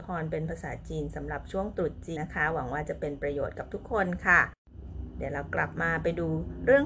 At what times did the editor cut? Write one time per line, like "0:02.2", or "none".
0:02.2